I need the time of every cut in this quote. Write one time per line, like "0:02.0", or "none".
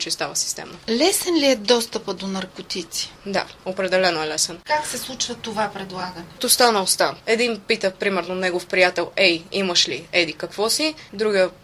none